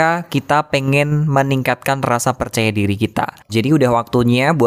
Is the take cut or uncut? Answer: cut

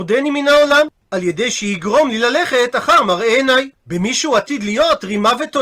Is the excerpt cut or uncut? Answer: cut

